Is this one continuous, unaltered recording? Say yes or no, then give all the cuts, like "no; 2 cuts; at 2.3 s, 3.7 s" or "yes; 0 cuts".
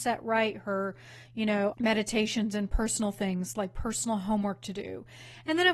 no; 1 cut; at 1.7 s